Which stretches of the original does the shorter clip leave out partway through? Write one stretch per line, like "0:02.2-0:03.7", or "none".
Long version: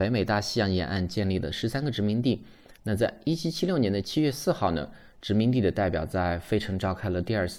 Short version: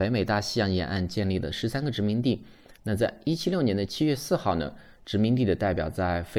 0:03.4-0:03.5